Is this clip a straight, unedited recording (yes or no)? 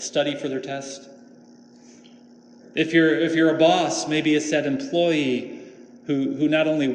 yes